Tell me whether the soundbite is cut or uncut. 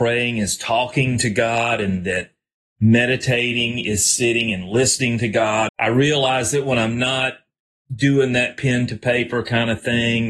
cut